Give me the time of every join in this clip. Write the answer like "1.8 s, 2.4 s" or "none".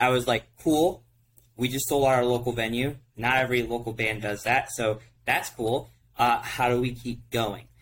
none